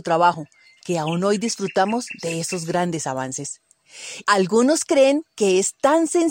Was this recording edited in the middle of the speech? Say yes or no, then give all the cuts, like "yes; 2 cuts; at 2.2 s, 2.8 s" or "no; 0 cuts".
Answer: yes; 1 cut; at 4.2 s